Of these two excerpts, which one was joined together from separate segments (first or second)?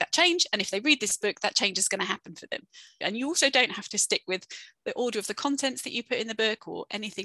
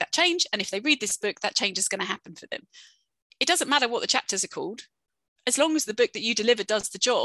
first